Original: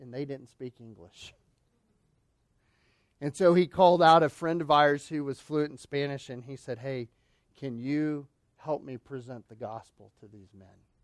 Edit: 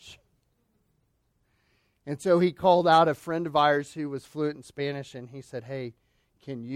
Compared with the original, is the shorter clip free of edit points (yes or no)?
yes